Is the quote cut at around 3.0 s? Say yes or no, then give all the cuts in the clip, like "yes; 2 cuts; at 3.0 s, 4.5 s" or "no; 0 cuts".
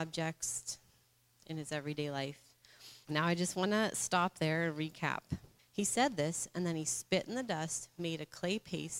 yes; 2 cuts; at 3.0 s, 5.6 s